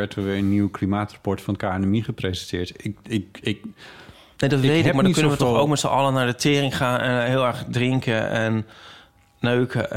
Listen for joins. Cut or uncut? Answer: uncut